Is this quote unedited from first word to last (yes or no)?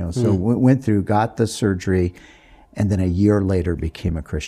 yes